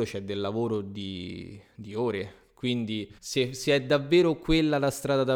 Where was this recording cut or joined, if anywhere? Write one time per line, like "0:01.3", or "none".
0:03.2